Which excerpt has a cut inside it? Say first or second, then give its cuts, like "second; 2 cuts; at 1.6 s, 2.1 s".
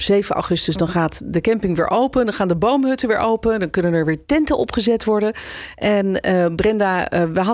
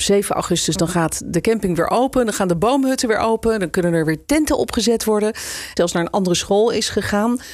second; 1 cut; at 5.8 s